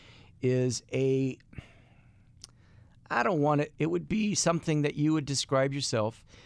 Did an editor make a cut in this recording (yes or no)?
yes